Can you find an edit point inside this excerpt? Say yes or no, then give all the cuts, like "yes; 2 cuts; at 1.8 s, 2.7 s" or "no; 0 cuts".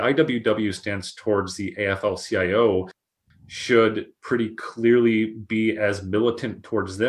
no; 0 cuts